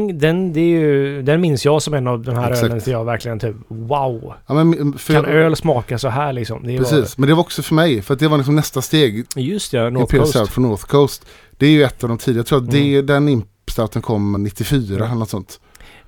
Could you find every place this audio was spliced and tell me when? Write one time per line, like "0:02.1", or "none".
0:09.2
0:14.4